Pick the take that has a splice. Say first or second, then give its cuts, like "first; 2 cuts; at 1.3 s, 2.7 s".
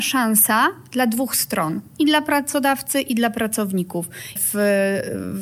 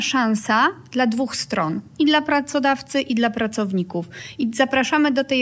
first; 1 cut; at 4.4 s